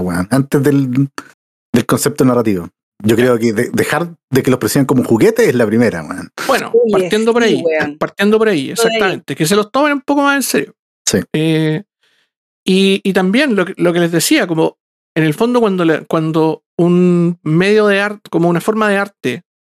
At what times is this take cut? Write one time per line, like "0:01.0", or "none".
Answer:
none